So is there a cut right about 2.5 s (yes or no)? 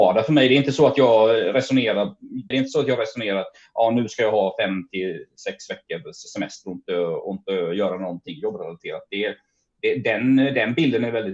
yes